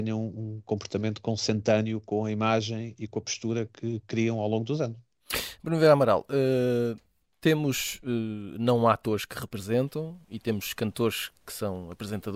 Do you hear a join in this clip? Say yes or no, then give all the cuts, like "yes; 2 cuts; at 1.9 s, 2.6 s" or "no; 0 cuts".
no; 0 cuts